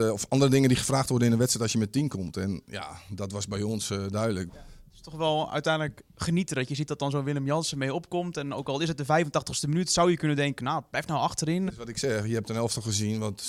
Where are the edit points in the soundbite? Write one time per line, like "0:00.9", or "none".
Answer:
0:04.5
0:11.7